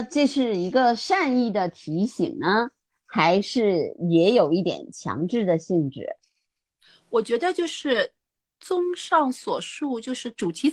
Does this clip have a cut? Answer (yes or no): no